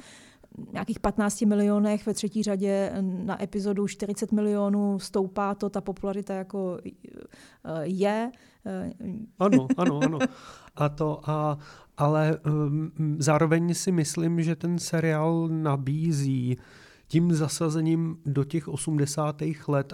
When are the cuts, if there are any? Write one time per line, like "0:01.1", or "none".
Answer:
0:09.4
0:10.7